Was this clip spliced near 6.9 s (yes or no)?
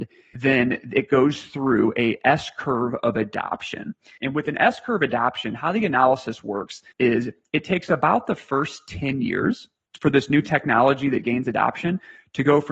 yes